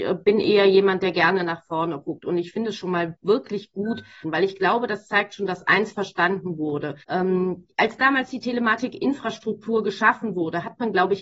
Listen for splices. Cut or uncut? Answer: cut